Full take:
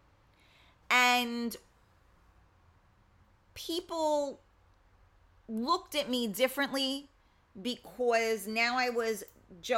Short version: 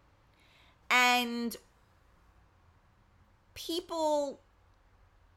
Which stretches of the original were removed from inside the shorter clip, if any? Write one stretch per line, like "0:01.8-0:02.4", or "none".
none